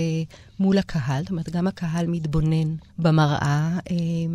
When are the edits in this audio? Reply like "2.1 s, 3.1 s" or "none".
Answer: 2.9 s